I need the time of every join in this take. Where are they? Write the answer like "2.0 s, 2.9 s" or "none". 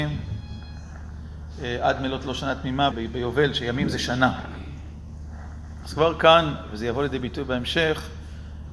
2.9 s, 5.8 s